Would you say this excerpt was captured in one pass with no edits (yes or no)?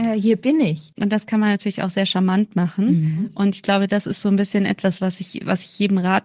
no